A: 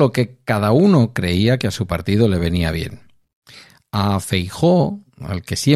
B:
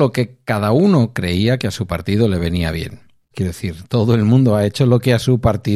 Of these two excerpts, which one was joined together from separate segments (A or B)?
B